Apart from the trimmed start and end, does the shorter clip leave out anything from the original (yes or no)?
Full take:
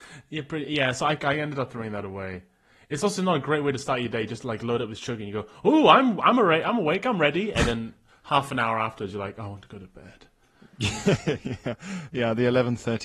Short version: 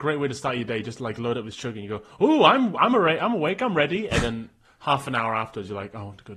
no